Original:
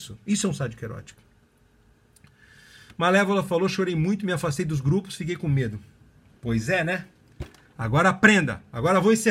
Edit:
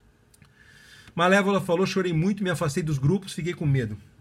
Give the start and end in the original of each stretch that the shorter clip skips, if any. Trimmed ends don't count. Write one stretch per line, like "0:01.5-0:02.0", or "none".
none